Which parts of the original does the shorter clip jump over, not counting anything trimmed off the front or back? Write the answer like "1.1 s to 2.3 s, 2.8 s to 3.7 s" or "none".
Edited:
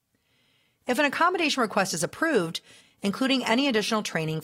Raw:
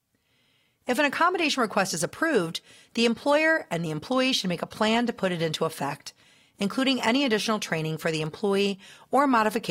2.8 s to 6.4 s